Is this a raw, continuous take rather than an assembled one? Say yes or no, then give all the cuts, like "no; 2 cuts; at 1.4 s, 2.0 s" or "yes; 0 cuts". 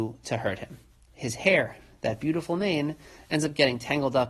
yes; 0 cuts